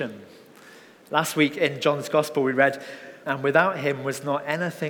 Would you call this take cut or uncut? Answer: cut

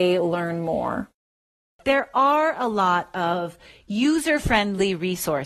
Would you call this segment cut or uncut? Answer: uncut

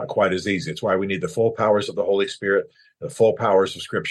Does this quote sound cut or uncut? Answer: uncut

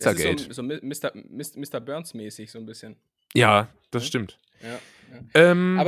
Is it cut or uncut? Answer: uncut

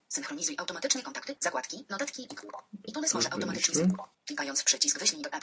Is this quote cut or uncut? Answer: cut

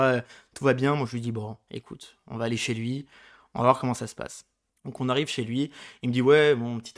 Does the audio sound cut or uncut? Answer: uncut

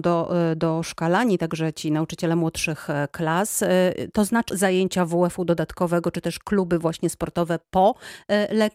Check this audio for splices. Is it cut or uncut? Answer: cut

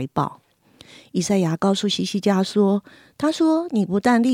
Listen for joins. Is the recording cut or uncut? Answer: uncut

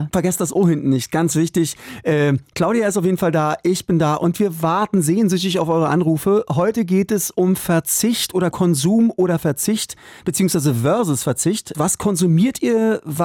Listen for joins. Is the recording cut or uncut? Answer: cut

